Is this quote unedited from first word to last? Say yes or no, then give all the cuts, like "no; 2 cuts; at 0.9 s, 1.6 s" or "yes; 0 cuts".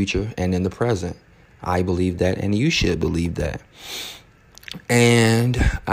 yes; 0 cuts